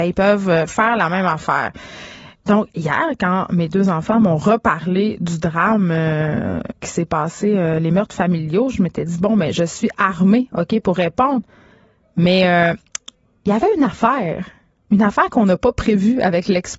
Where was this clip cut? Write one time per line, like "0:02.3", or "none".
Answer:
none